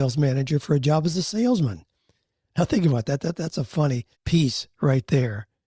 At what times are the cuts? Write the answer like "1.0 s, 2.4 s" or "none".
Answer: 2.4 s, 4.1 s